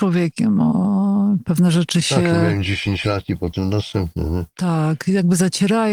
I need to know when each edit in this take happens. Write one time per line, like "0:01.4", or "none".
none